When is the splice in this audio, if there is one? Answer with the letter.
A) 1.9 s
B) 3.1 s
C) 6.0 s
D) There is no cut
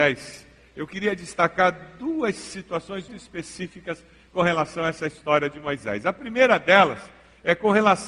B